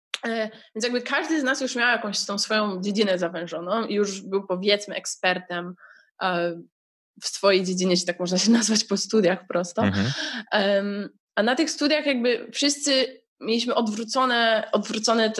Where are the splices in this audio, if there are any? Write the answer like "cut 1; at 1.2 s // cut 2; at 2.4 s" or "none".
cut 1; at 13.3 s